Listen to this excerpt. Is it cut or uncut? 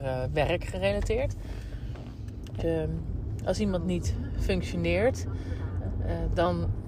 cut